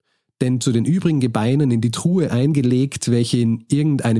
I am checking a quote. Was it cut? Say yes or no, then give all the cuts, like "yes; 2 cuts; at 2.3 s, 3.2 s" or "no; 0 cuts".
no; 0 cuts